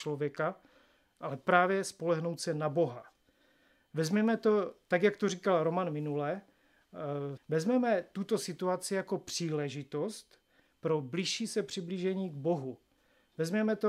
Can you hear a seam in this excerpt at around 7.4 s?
yes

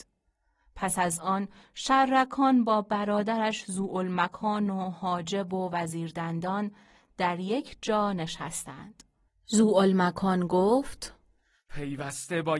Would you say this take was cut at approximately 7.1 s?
no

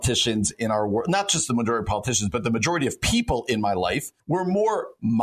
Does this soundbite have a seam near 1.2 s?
no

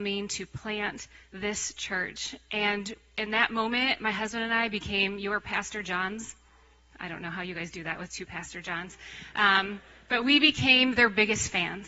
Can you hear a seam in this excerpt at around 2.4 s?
no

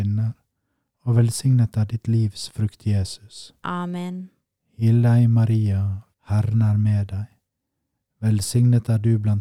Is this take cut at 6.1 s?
yes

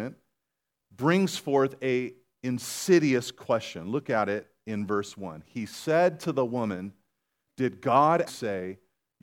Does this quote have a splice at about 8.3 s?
yes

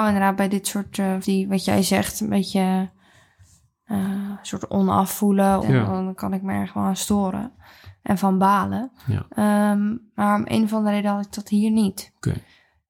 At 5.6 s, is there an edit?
yes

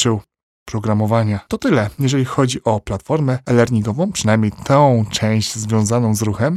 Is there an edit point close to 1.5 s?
yes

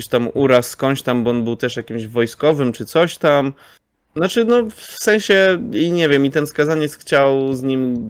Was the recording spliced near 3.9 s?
yes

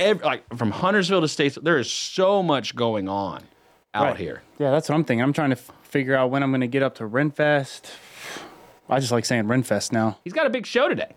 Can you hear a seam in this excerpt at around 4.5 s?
no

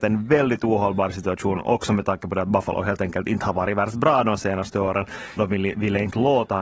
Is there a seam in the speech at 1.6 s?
no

